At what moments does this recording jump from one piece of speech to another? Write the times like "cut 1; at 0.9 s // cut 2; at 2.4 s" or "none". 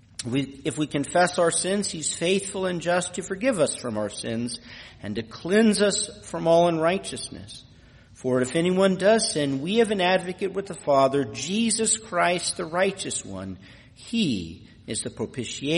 none